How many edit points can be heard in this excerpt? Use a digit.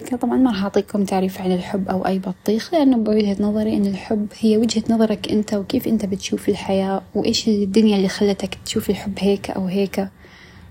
0